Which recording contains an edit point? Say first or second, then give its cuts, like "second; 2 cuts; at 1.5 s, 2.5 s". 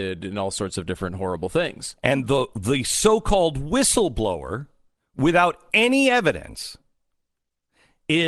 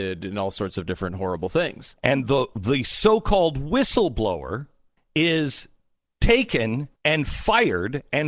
second; 2 cuts; at 5.0 s, 7.0 s